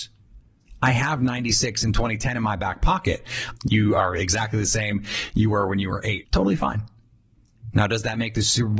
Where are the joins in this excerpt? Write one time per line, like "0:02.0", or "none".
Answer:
0:03.6
0:06.2
0:07.7